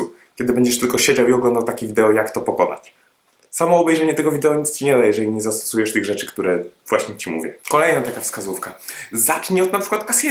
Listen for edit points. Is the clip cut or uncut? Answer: uncut